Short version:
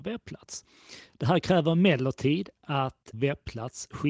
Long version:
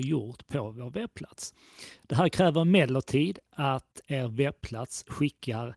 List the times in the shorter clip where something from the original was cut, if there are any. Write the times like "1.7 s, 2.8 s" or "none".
3.1 s